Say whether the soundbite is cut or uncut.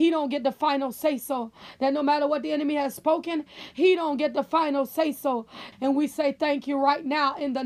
cut